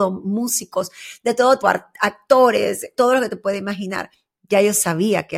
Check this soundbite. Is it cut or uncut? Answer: cut